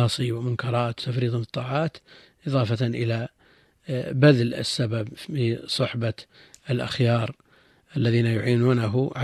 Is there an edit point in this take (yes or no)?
no